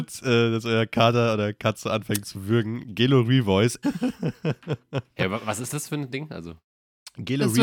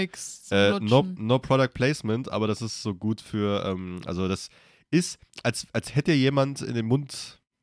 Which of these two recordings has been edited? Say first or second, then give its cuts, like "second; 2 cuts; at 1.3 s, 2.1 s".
first; 1 cut; at 3.8 s